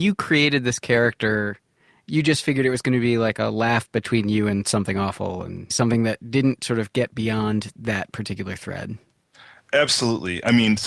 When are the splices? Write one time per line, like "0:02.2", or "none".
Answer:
none